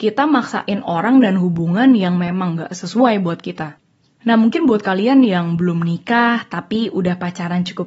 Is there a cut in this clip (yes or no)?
no